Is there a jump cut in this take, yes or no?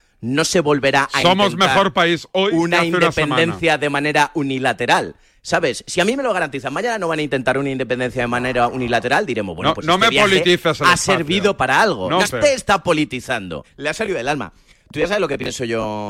yes